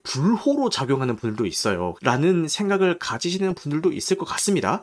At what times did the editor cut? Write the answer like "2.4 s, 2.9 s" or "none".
2.0 s